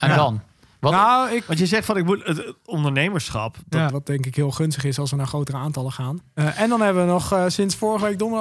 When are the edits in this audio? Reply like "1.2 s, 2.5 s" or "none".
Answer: 3.9 s, 6.2 s